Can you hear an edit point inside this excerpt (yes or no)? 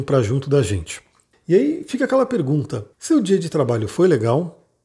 yes